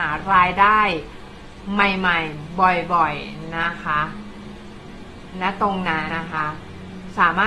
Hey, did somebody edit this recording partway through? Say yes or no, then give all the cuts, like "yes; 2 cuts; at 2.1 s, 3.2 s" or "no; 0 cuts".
yes; 1 cut; at 6.1 s